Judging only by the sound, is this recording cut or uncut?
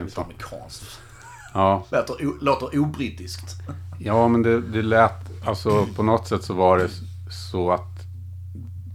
uncut